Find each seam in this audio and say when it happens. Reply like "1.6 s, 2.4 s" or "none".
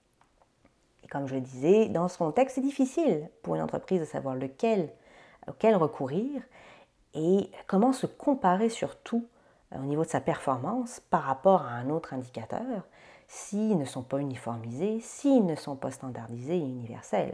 none